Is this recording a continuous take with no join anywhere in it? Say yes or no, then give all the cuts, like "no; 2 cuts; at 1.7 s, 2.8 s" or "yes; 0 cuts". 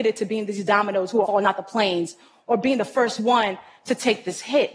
no; 1 cut; at 1.2 s